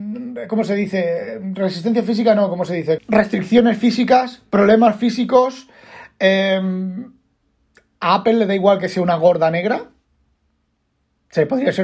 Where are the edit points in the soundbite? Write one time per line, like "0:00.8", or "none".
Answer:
0:03.0